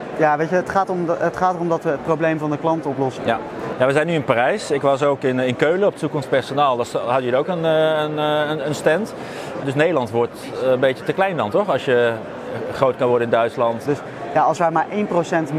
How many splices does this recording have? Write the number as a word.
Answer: three